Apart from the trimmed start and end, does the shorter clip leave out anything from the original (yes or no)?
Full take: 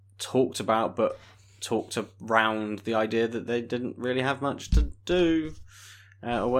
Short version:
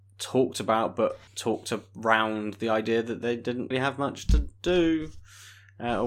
yes